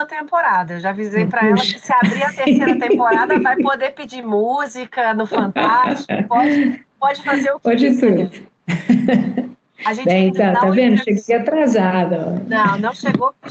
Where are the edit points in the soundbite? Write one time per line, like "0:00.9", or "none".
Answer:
none

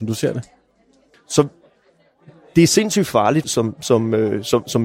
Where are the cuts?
0:01.1
0:03.4

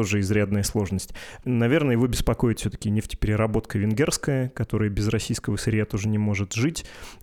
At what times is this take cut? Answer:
0:01.4

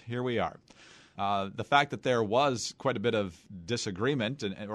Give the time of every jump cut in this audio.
0:01.2

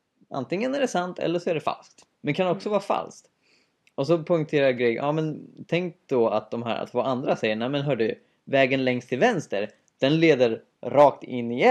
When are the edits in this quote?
0:02.1

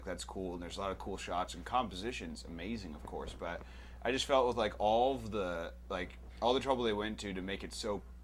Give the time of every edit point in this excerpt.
none

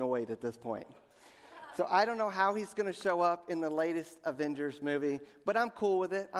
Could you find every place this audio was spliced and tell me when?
none

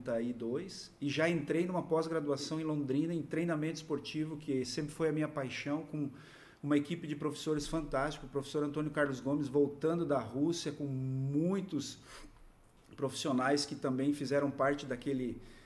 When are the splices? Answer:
none

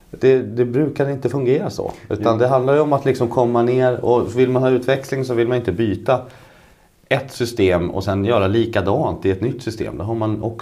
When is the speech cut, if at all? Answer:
none

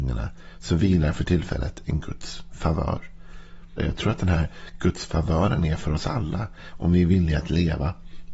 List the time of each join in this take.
0:03.8

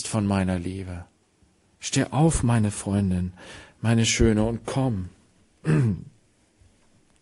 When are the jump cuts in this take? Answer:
0:01.7

